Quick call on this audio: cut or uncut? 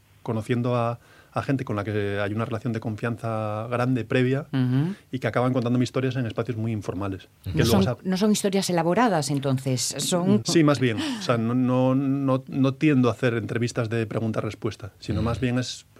cut